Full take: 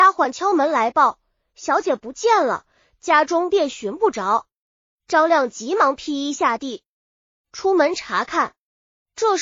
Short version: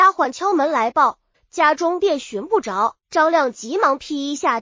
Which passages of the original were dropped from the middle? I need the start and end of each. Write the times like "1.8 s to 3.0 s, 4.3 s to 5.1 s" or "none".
1.3 s to 2.8 s, 4.5 s to 5.0 s